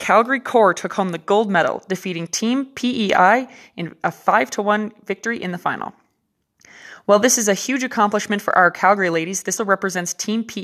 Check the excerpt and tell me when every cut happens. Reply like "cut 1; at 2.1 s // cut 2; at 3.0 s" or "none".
cut 1; at 9.6 s